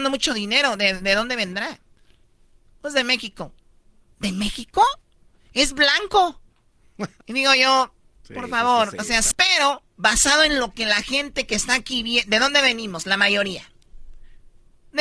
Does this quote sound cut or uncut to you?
cut